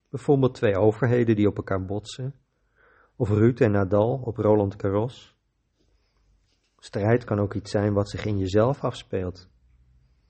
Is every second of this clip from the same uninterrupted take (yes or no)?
yes